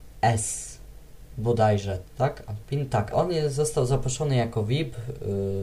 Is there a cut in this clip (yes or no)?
yes